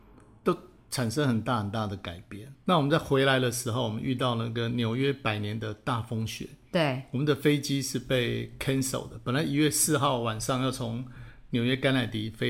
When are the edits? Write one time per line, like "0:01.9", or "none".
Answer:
0:02.5